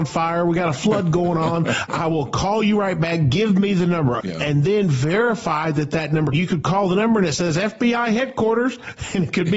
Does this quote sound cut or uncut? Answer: cut